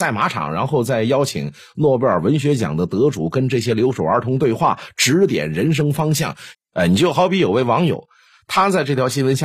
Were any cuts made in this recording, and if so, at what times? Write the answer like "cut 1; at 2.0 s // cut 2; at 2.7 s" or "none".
cut 1; at 6.5 s